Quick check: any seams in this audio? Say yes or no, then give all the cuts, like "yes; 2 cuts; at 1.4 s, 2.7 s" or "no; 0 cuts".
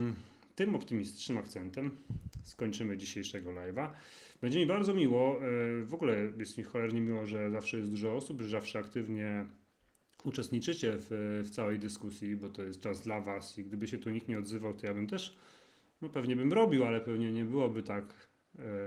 no; 0 cuts